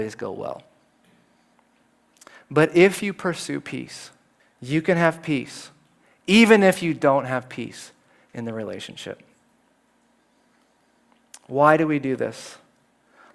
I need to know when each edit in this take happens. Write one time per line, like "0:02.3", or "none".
0:04.4